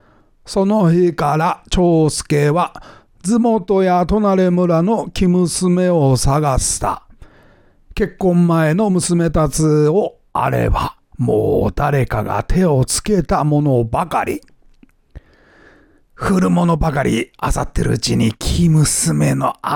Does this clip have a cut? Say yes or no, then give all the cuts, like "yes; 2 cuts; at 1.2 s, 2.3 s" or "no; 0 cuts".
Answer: yes; 1 cut; at 11.1 s